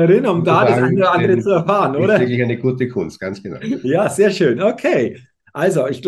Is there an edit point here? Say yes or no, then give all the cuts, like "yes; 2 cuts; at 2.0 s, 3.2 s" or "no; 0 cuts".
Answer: no; 0 cuts